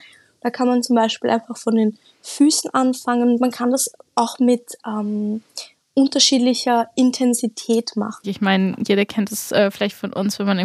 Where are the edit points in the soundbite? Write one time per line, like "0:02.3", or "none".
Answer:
0:08.2